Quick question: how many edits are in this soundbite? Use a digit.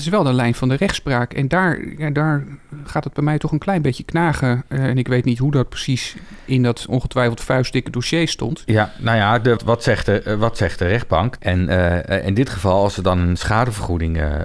2